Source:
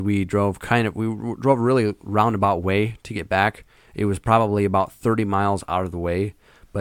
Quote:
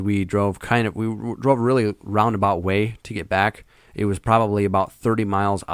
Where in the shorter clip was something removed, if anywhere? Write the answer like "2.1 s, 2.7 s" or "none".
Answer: none